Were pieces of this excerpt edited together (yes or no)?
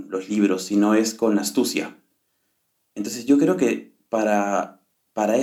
no